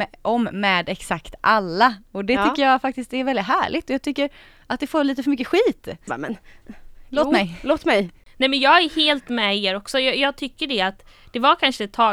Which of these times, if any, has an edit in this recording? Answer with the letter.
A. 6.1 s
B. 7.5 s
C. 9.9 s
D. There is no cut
A